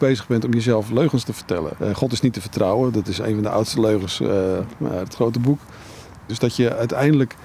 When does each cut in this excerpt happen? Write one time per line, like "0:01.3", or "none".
0:01.8
0:06.3